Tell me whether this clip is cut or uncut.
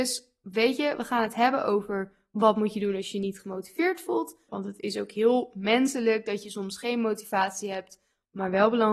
cut